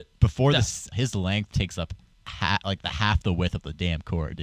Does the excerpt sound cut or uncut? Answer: cut